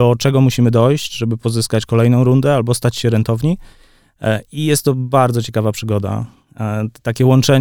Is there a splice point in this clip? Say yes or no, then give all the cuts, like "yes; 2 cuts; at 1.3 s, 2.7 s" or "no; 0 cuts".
no; 0 cuts